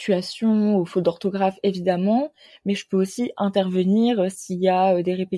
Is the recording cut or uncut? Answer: uncut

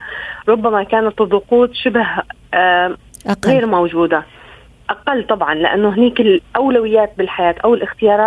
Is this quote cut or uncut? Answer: uncut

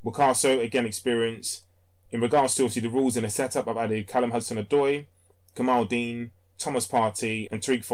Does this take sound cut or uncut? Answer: uncut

